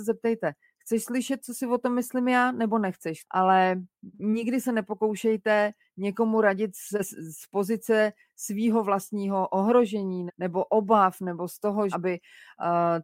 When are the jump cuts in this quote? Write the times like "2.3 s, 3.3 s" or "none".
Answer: 3.2 s, 10.3 s, 11.9 s